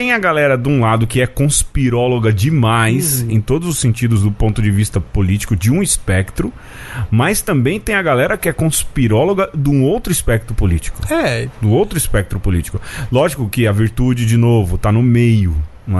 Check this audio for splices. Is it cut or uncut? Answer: uncut